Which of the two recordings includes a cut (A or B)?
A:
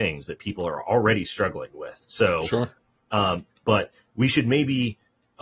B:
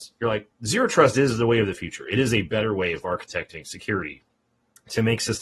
A